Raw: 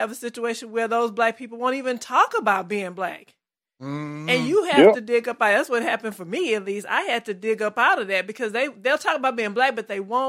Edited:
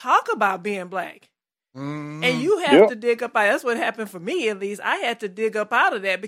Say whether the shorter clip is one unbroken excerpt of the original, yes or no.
yes